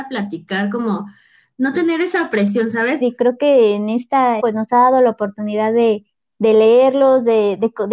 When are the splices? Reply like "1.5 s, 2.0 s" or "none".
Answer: 3.0 s, 4.4 s

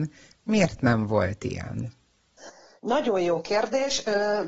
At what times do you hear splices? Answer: none

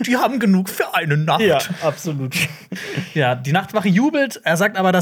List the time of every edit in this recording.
none

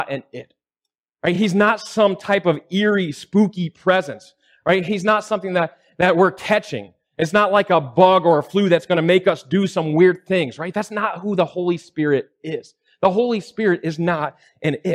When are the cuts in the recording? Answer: none

